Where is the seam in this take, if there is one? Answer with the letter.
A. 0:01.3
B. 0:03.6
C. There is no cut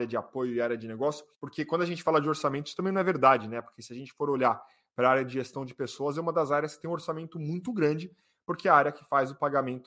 A